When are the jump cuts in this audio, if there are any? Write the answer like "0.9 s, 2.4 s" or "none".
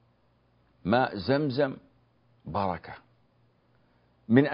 none